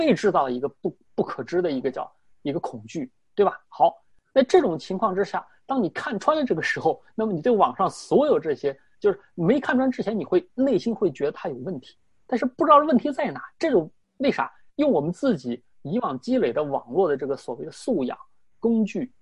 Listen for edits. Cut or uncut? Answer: cut